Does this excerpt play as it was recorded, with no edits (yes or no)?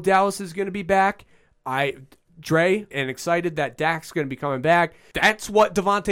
no